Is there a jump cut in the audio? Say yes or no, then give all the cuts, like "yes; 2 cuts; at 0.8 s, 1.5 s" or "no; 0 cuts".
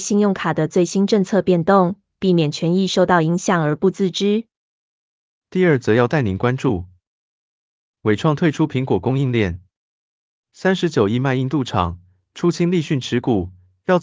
no; 0 cuts